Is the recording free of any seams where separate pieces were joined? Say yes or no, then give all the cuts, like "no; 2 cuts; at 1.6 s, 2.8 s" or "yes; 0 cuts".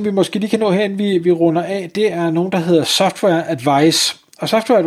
yes; 0 cuts